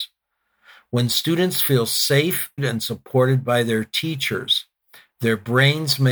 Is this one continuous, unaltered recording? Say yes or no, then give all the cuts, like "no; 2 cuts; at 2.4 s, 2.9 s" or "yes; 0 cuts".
no; 1 cut; at 2.6 s